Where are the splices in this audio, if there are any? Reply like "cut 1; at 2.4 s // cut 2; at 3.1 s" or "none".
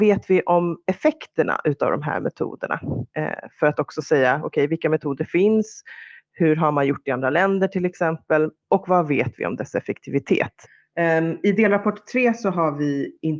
none